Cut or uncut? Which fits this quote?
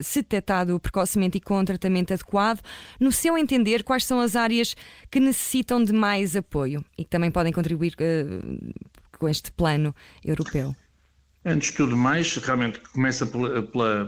uncut